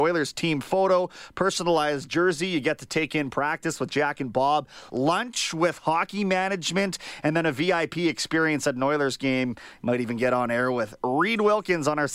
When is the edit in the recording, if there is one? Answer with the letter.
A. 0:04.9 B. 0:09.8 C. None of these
C